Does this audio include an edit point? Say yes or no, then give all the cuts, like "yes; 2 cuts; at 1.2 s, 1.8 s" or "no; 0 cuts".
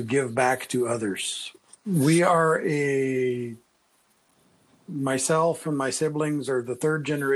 yes; 1 cut; at 1.5 s